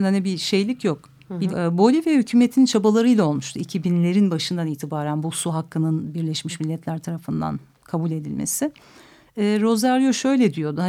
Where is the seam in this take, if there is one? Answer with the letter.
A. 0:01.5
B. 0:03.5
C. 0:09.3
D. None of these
A